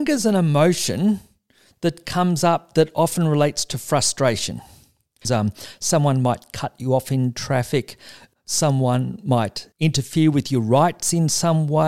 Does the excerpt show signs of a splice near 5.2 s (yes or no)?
yes